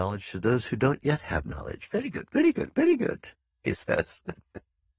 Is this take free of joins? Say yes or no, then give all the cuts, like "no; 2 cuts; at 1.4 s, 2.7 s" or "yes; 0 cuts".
yes; 0 cuts